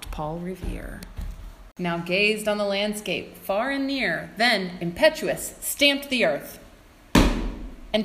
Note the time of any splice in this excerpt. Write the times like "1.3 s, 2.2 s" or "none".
none